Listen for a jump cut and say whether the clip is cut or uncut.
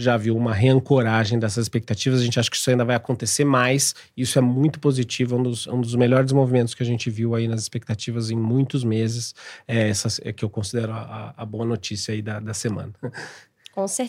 uncut